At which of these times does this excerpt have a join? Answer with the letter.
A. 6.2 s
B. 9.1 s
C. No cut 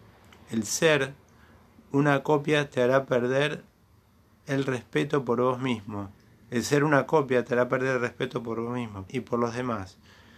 B